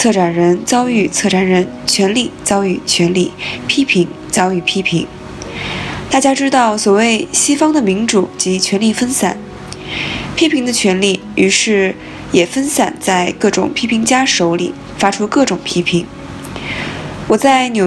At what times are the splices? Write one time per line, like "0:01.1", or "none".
none